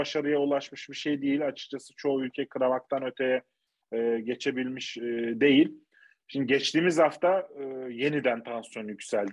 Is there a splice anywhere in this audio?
no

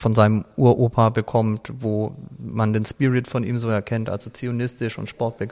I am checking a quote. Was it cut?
no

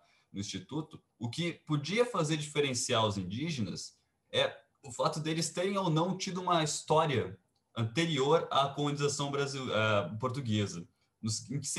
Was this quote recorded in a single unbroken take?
no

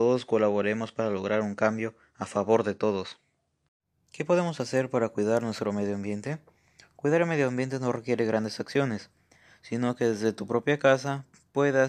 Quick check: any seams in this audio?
no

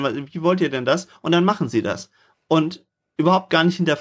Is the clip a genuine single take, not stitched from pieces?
yes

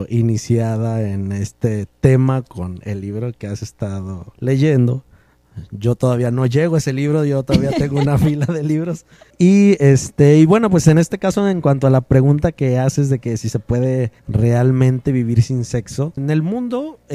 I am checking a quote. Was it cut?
yes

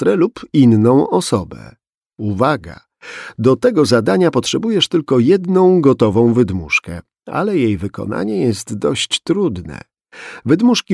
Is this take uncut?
yes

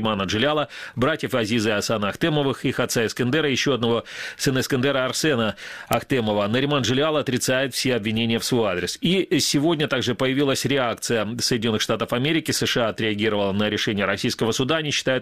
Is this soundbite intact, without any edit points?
yes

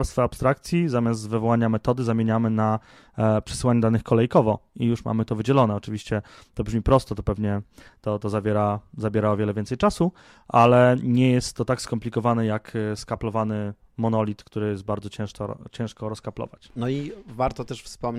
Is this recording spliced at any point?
no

